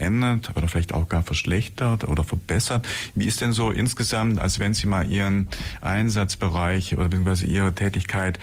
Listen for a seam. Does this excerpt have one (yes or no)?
no